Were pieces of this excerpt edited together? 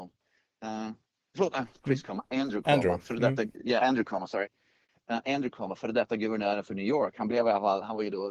no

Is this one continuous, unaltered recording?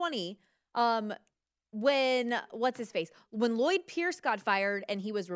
yes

